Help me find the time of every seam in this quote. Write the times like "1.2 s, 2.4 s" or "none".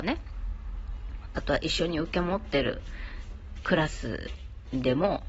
3.6 s